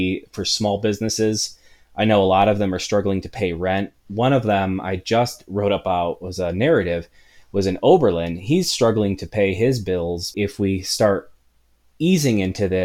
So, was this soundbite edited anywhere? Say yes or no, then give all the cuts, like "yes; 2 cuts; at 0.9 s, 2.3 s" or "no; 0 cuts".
yes; 1 cut; at 10.3 s